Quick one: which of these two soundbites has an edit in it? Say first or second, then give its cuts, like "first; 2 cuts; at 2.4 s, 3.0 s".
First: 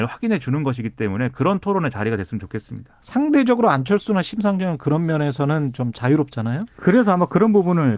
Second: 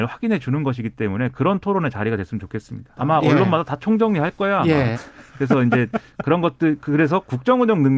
second; 2 cuts; at 3.0 s, 4.9 s